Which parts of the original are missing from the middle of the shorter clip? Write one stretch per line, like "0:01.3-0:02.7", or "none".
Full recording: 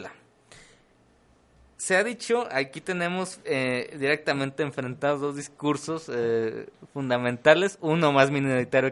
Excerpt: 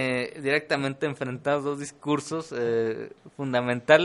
none